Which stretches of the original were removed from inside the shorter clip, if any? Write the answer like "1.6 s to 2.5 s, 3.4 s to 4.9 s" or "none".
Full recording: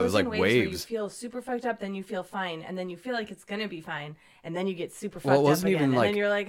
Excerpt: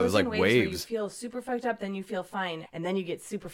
2.6 s to 4.3 s